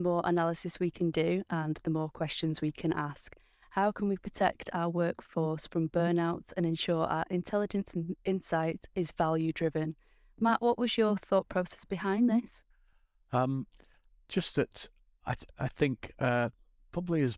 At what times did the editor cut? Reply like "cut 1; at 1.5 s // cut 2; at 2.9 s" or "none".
none